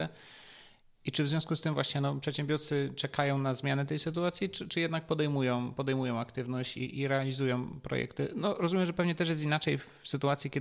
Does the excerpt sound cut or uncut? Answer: uncut